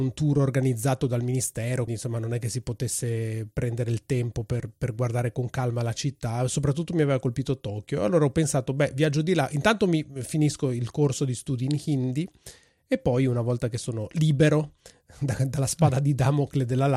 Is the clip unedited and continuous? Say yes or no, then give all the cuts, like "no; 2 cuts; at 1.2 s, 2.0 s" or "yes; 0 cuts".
no; 1 cut; at 1.9 s